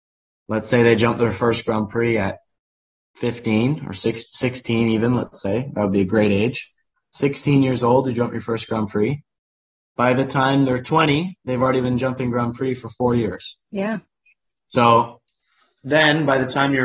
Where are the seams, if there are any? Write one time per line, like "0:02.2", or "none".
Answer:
none